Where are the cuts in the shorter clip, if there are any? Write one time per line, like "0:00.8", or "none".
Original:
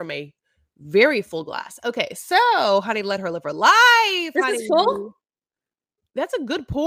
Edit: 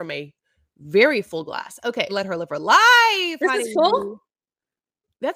0:02.1